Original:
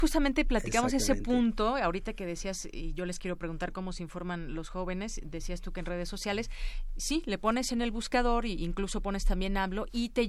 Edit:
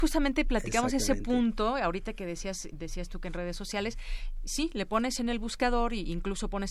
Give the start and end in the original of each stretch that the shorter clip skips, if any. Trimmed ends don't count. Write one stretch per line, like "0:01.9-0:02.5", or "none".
0:02.7-0:05.2